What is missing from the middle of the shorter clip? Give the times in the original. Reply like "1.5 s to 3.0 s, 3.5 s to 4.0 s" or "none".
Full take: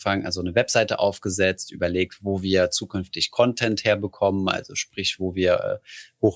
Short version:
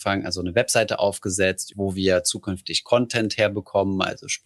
1.7 s to 2.2 s